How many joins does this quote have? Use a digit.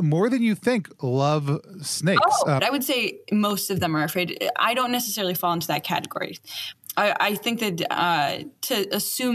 1